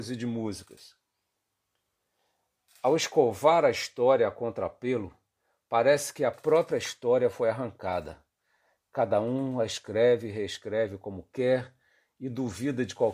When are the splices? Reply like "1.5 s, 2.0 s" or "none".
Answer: none